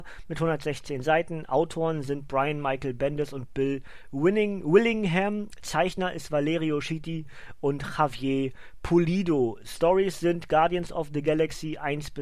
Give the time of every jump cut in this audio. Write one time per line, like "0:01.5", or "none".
none